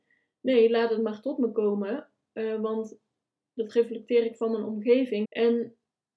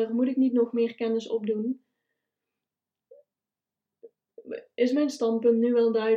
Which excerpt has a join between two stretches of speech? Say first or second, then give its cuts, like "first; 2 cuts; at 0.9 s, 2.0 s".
first; 1 cut; at 5.2 s